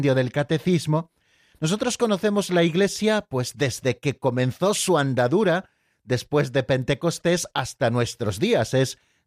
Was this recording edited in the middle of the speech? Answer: no; 0 cuts

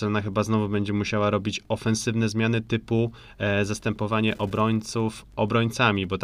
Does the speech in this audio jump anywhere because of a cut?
no; 0 cuts

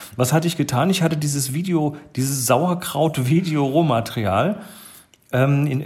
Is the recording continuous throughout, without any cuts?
yes; 0 cuts

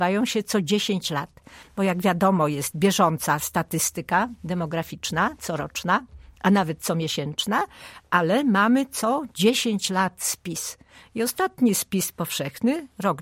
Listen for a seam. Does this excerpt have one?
no; 0 cuts

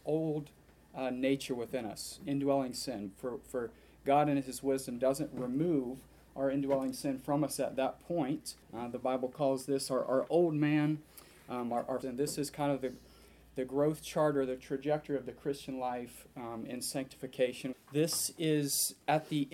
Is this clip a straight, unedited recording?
no; 3 cuts; at 8.6 s, 12.0 s, 17.7 s

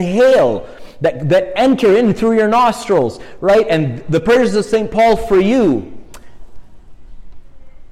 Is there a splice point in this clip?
no; 0 cuts

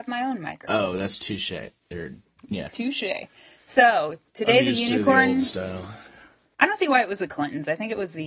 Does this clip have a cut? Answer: yes; 2 cuts; at 2.7 s, 6.5 s

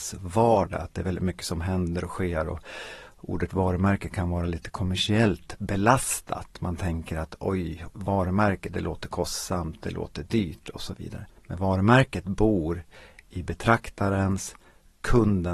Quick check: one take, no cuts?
no; 2 cuts; at 7.9 s, 11.3 s

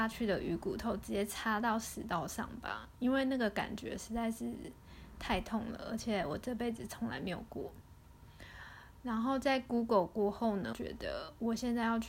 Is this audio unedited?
no; 1 cut; at 10.7 s

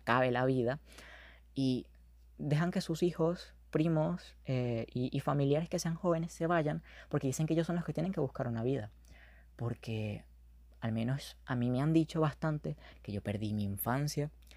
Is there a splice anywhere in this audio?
no; 0 cuts

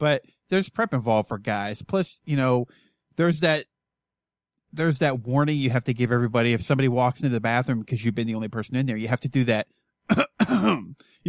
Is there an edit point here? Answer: no; 0 cuts

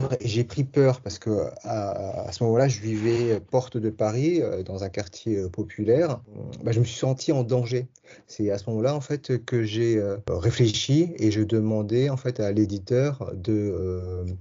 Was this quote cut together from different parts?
no; 0 cuts

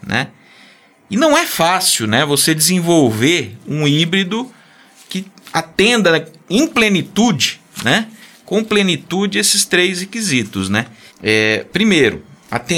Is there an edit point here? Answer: yes; 1 cut; at 11.1 s

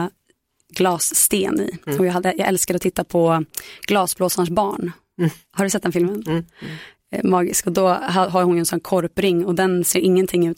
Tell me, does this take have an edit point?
no; 0 cuts

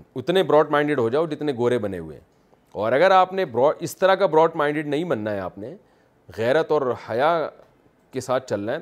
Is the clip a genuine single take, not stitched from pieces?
yes; 0 cuts

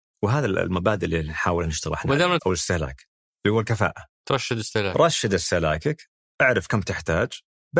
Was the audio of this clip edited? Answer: yes; 1 cut; at 2.4 s

